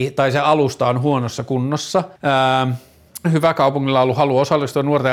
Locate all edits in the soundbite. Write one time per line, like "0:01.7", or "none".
0:02.1
0:03.2